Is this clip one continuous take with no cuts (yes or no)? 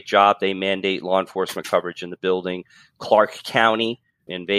yes